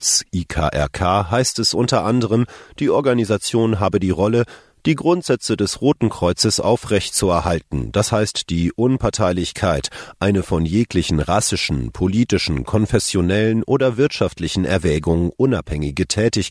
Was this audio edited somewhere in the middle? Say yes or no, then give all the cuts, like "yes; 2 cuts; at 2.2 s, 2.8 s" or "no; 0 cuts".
no; 0 cuts